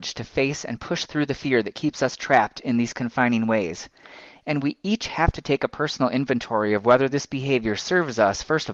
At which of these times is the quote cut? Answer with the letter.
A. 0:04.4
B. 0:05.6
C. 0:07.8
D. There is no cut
D